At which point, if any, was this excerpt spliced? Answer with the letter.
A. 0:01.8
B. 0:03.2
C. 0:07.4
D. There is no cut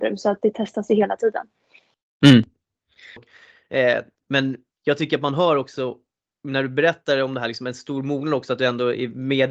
B